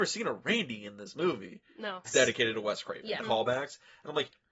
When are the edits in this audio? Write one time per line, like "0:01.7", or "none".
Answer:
0:02.0
0:03.2